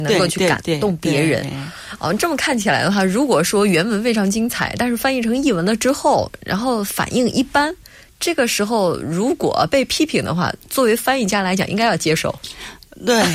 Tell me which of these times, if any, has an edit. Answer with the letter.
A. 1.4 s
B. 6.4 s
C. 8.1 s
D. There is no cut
A